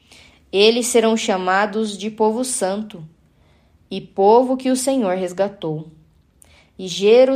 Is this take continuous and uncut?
yes; 0 cuts

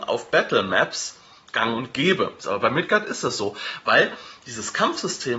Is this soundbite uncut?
no; 1 cut; at 2.4 s

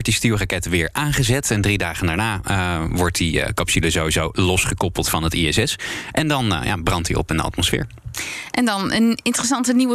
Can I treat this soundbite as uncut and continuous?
yes; 0 cuts

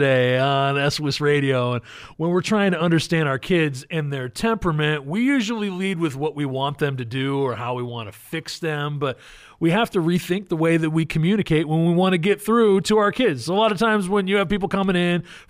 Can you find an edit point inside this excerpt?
no; 0 cuts

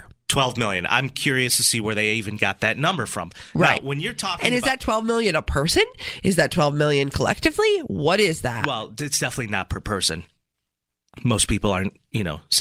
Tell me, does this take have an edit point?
no; 0 cuts

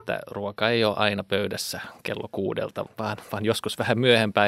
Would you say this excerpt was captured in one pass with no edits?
no; 1 cut; at 2.9 s

